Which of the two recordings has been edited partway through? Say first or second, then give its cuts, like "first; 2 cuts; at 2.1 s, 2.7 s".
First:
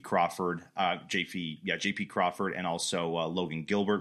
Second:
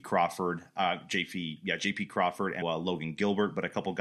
second; 1 cut; at 2.6 s